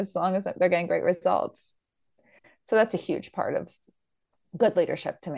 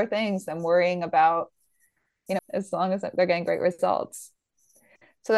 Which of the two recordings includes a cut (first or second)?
second